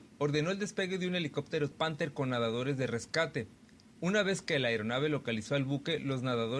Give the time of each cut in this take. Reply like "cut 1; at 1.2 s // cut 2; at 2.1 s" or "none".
cut 1; at 1.7 s